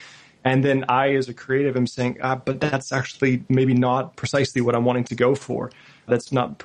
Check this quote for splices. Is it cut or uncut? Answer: uncut